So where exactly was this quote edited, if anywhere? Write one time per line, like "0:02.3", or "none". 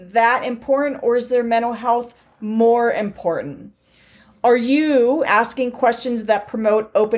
0:05.2